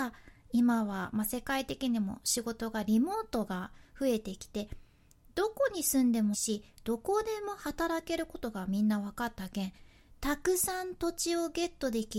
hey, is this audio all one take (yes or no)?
no